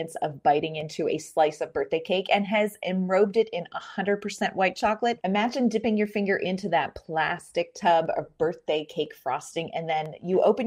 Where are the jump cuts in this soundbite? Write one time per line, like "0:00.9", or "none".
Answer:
0:05.2

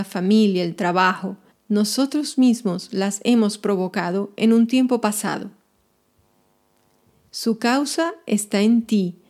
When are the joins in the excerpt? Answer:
0:01.5

